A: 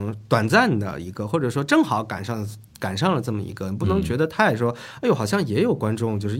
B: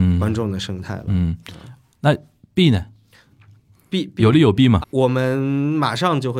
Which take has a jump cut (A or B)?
B